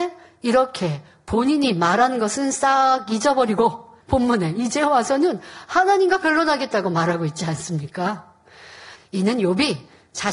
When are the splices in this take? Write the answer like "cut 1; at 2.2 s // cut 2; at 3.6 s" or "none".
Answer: cut 1; at 4.0 s // cut 2; at 9.0 s